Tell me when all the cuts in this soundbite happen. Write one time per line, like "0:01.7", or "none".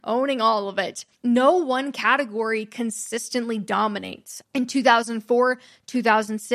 0:01.1
0:04.4